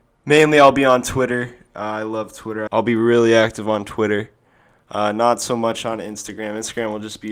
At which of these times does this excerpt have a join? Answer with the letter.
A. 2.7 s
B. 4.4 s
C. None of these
A